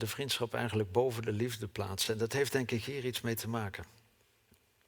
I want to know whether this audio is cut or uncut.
uncut